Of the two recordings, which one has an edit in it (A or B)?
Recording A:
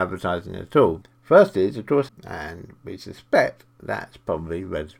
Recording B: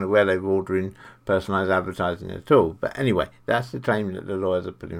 A